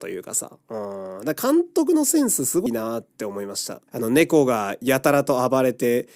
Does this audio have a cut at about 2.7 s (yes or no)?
yes